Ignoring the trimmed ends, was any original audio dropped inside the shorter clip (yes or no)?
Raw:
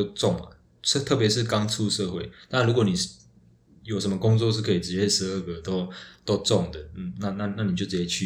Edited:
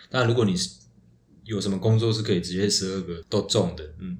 yes